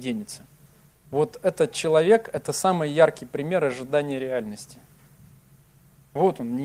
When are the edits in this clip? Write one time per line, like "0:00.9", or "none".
0:00.9